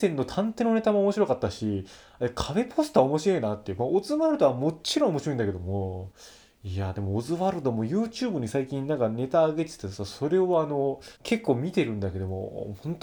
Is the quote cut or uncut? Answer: cut